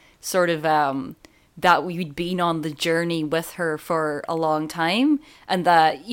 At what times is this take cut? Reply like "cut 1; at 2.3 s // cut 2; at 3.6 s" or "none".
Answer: none